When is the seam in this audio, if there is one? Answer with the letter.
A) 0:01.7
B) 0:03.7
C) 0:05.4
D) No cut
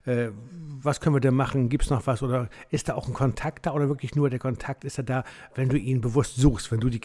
D